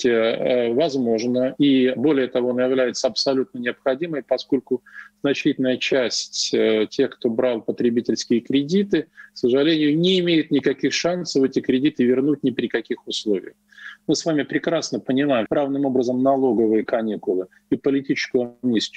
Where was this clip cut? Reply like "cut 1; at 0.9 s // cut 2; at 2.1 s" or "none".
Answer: cut 1; at 14.0 s // cut 2; at 15.5 s